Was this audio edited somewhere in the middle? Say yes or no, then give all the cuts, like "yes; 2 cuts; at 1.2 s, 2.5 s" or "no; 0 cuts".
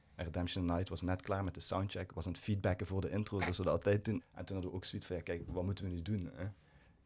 yes; 1 cut; at 4.2 s